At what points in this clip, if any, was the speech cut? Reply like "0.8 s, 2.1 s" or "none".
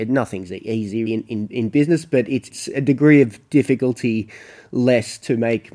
1.1 s